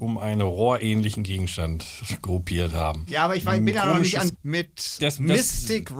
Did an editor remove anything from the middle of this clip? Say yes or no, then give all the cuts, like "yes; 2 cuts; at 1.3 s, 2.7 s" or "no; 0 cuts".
yes; 1 cut; at 4.3 s